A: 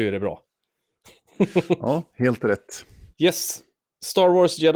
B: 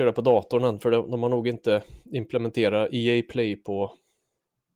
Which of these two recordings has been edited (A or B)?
A